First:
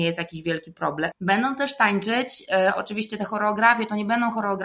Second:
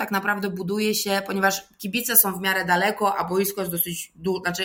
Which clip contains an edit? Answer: first; 1 cut; at 1.1 s

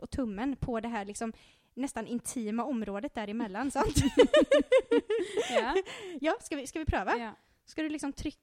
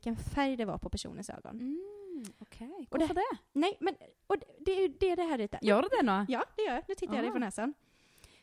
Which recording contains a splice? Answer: second; 1 cut; at 5.6 s

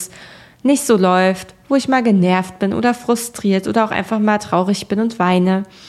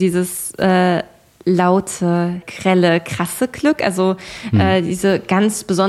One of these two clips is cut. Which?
second; 1 cut; at 2.4 s

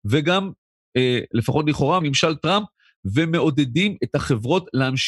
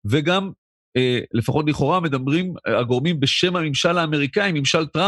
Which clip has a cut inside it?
first; 1 cut; at 2.0 s

